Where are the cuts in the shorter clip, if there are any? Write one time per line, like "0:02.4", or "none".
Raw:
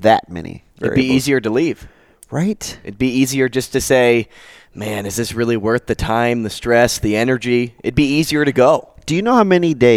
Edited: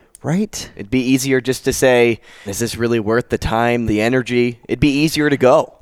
0:02.5
0:03.9